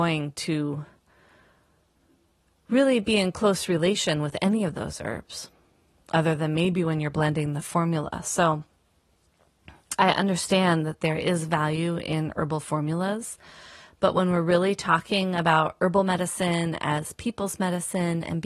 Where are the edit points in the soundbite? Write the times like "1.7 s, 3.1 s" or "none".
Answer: none